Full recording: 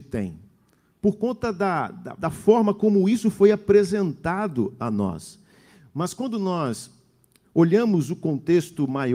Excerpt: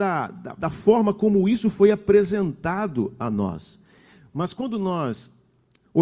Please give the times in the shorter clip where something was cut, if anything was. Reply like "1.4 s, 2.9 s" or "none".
none

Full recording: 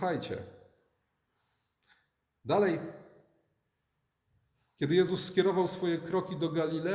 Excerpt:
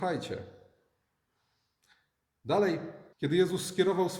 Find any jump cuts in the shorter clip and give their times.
3.1 s

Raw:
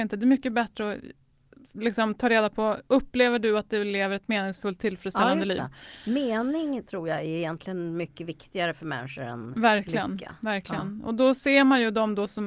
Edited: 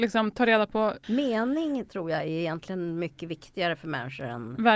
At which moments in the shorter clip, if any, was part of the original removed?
1.0 s

